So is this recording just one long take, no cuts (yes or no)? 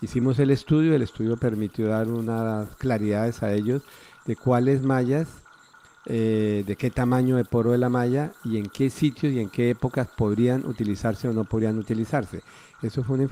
yes